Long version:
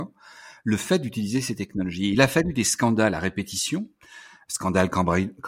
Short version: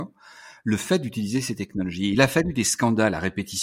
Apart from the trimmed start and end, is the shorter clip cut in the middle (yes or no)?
no